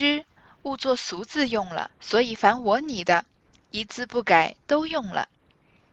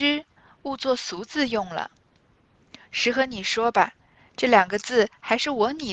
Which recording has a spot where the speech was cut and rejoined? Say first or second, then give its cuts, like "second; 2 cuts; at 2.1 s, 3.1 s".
first; 1 cut; at 1.9 s